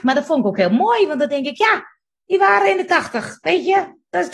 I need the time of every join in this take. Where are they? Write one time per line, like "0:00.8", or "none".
none